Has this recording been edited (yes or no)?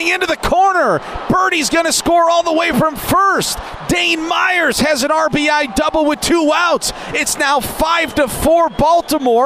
no